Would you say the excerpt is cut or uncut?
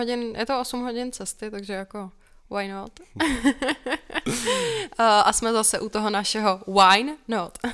uncut